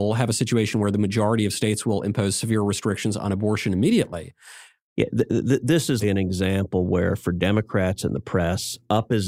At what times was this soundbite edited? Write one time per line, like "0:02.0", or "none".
0:04.8
0:06.0